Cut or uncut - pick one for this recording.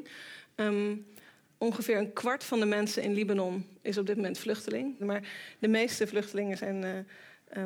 cut